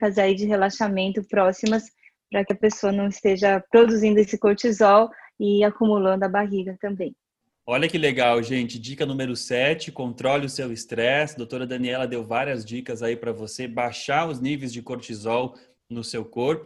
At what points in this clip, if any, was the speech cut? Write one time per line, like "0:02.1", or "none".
none